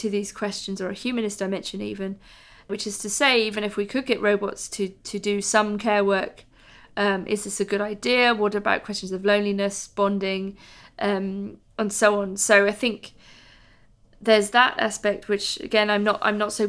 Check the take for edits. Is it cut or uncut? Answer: uncut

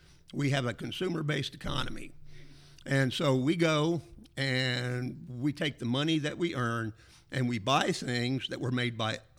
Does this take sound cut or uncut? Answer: uncut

